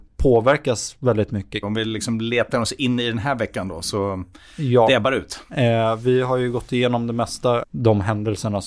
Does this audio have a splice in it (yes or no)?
yes